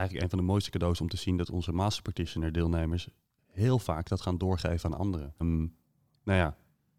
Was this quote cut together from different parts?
yes; 1 cut; at 5.4 s

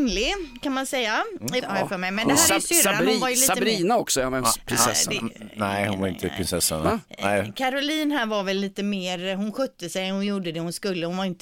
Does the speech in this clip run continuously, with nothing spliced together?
no; 1 cut; at 1.6 s

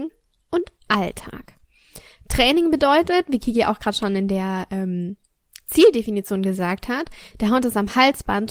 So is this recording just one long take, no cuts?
yes; 0 cuts

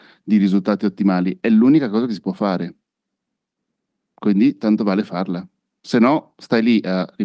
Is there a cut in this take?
no; 0 cuts

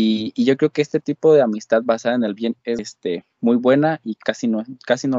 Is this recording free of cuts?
no; 2 cuts; at 2.8 s, 4.2 s

